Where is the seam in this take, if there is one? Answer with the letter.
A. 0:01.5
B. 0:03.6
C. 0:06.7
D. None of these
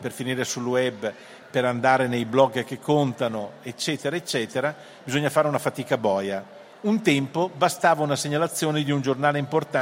D